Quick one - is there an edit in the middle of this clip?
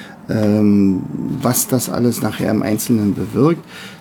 no; 0 cuts

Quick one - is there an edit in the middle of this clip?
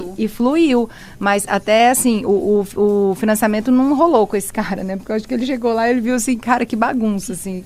no; 0 cuts

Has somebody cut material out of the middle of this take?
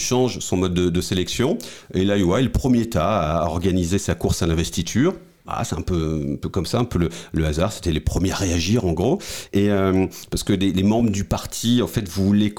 yes; 1 cut; at 9.5 s

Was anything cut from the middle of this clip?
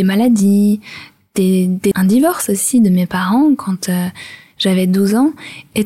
yes; 1 cut; at 1.9 s

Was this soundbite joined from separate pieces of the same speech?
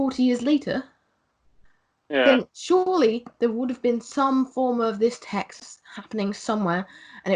no; 0 cuts

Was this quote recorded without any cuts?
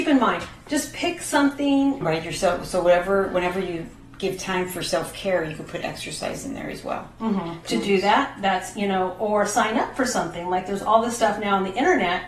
no; 2 cuts; at 2.0 s, 7.6 s

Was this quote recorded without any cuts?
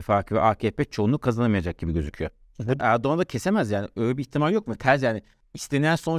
no; 1 cut; at 2.8 s

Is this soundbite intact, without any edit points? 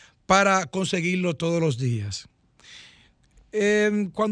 yes; 0 cuts

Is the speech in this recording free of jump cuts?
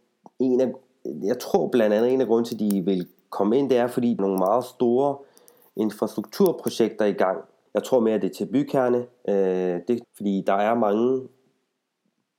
no; 3 cuts; at 4.2 s, 7.7 s, 10.0 s

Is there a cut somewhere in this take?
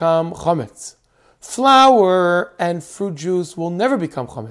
no; 0 cuts

